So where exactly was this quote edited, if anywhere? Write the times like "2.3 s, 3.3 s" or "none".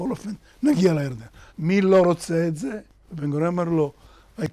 1.5 s, 3.0 s